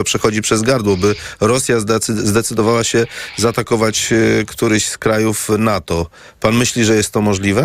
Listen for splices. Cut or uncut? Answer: uncut